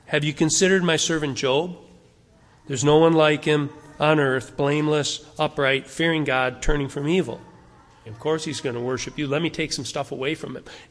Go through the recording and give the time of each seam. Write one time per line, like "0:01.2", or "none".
0:08.1